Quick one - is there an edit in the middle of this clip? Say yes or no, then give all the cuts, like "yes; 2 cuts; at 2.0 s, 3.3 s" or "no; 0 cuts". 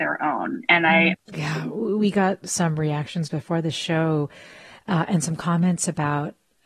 yes; 1 cut; at 1.1 s